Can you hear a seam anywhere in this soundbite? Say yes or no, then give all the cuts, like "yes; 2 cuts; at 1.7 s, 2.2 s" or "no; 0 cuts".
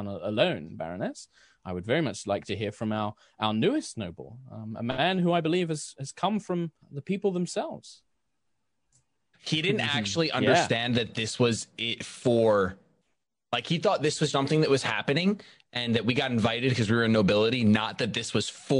yes; 3 cuts; at 6.8 s, 9.3 s, 14.3 s